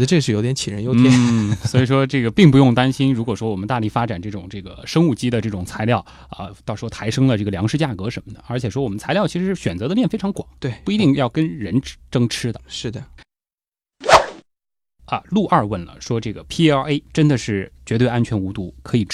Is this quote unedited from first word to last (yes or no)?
no